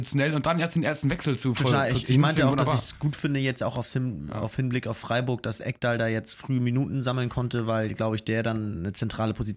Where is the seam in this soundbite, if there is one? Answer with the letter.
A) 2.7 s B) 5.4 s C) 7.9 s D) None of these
D